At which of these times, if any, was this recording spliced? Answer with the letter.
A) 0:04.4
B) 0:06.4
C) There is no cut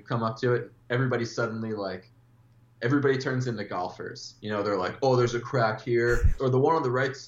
B